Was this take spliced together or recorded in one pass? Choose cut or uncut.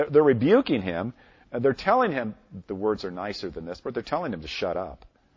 cut